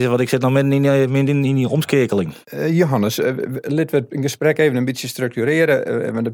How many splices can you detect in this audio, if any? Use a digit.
1